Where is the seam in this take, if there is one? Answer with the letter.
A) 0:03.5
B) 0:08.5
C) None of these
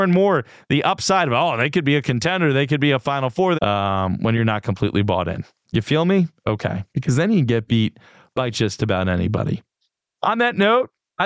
A